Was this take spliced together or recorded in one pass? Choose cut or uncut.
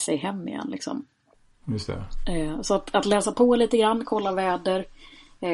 uncut